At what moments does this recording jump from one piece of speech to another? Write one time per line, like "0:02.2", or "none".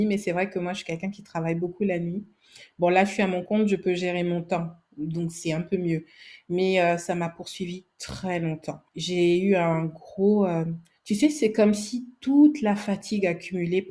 0:08.9